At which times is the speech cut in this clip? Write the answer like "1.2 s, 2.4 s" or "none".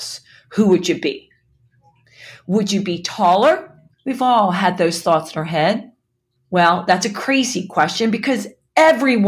3.9 s, 6.4 s